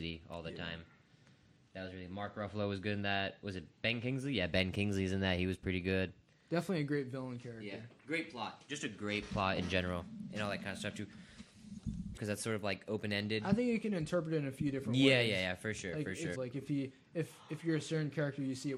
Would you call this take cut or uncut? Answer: cut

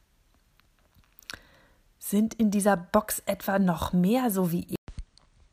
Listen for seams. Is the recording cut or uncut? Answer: uncut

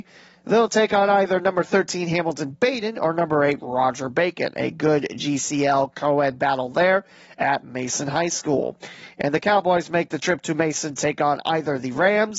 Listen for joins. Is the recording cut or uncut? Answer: uncut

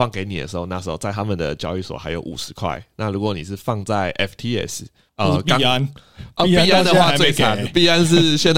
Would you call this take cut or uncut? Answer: uncut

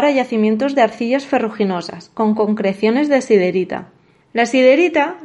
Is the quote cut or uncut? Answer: cut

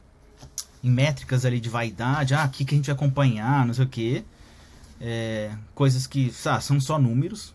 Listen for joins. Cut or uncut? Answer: uncut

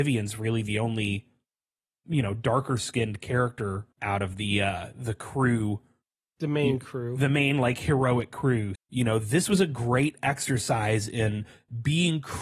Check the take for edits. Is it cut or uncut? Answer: cut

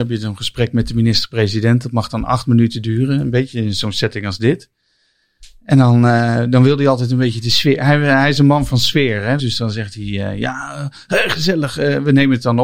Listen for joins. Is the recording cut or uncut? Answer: cut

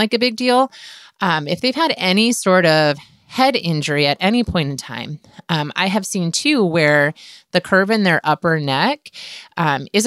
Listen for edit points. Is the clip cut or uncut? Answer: uncut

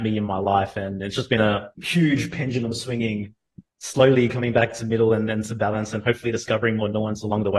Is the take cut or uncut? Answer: cut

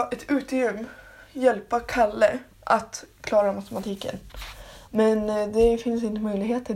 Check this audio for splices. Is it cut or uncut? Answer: cut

